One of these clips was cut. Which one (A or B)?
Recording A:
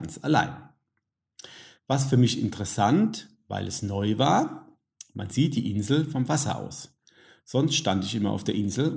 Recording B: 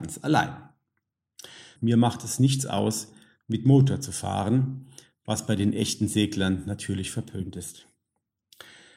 B